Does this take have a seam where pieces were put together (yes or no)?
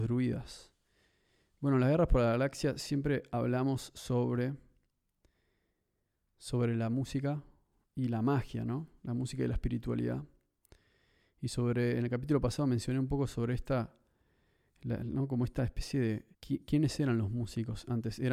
yes